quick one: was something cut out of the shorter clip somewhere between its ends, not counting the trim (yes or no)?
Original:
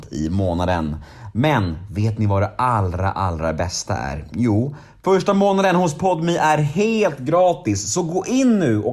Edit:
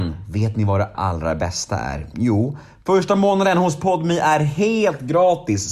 yes